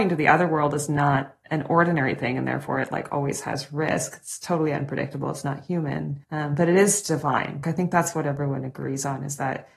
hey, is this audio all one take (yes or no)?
no